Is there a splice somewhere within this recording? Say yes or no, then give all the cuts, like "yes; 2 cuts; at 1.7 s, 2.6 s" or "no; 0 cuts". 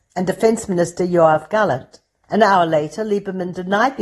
yes; 1 cut; at 2.2 s